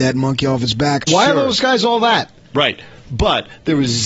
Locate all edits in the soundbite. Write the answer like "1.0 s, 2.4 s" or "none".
1.1 s, 2.5 s